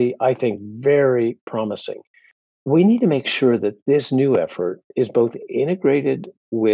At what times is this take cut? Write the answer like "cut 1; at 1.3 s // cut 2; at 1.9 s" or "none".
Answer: cut 1; at 2.4 s // cut 2; at 4.9 s